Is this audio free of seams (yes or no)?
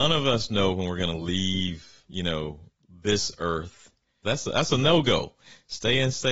no